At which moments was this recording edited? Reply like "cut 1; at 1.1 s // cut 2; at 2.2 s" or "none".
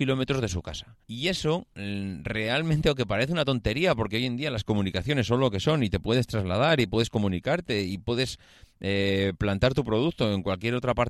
cut 1; at 1.0 s